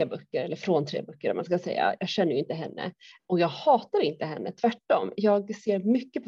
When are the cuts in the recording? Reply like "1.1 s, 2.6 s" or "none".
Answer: none